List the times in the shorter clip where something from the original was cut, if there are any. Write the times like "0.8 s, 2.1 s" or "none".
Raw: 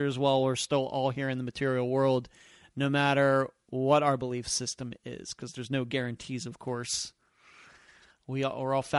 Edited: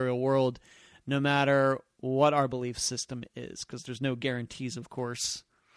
none